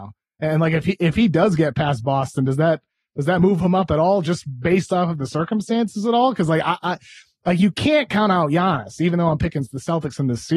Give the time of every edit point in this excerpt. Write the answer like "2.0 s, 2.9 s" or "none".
none